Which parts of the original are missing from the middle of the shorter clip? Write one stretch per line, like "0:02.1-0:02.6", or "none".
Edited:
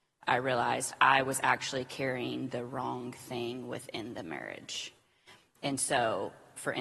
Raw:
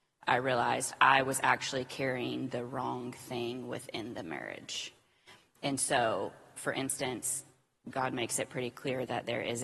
none